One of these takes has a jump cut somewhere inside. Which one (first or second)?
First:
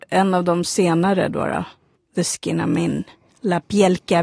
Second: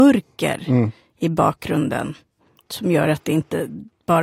first